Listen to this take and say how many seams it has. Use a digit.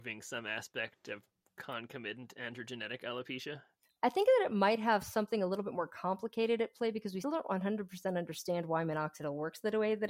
1